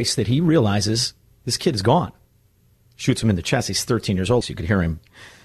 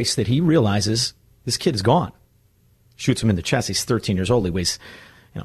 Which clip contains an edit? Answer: first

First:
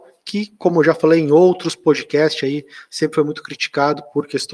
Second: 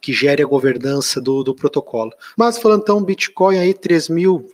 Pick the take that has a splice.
second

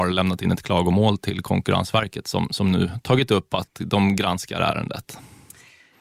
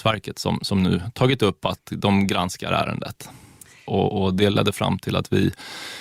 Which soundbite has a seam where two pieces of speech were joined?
second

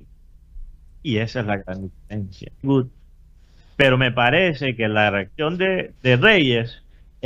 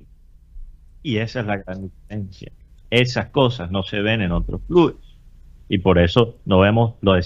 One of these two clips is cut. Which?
first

